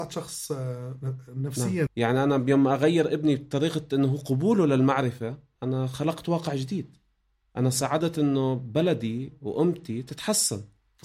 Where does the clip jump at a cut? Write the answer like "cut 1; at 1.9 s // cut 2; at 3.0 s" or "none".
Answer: cut 1; at 1.9 s // cut 2; at 5.6 s